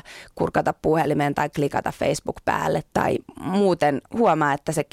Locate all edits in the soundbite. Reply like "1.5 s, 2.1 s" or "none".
2.9 s